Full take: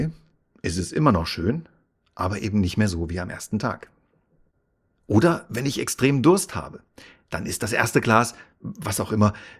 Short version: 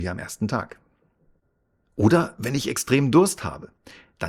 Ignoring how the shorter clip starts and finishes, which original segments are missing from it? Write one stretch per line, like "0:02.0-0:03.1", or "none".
none